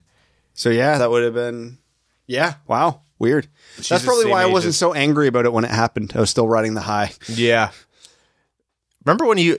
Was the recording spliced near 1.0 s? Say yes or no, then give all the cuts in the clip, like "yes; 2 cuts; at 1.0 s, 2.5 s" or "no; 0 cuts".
no; 0 cuts